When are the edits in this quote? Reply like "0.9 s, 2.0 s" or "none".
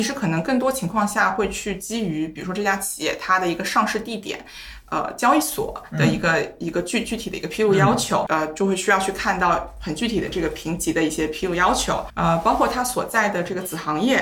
8.3 s, 12.1 s